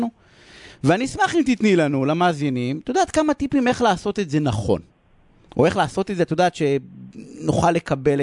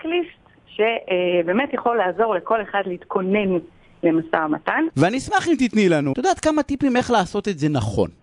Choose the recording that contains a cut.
second; 2 cuts; at 4.9 s, 6.1 s

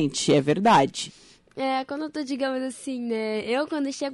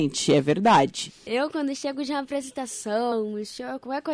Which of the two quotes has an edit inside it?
second; 2 cuts; at 1.3 s, 3.1 s

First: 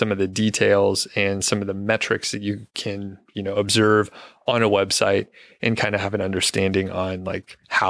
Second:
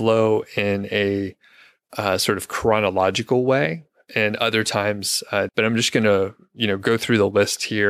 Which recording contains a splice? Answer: second; 1 cut; at 5.5 s

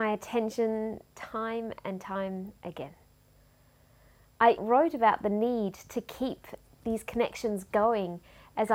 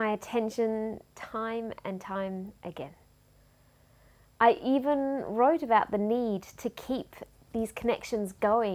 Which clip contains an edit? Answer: first; 1 cut; at 4.6 s

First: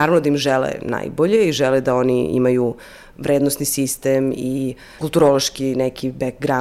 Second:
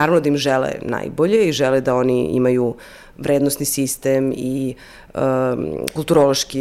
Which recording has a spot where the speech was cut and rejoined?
first; 1 cut; at 5.0 s

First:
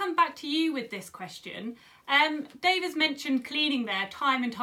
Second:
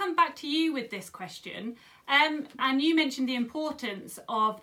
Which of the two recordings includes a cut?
second; 1 cut; at 2.6 s

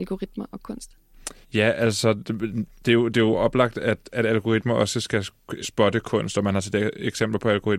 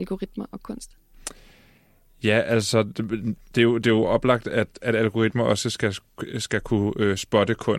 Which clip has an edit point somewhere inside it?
first; 2 cuts; at 1.4 s, 5.6 s

